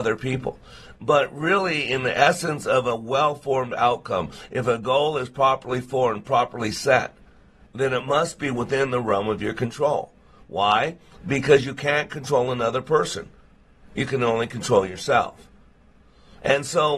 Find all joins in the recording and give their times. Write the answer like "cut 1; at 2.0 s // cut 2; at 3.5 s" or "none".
none